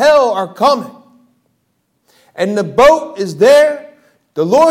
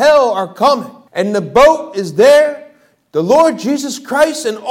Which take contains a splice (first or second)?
second